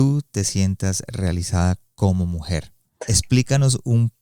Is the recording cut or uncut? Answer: cut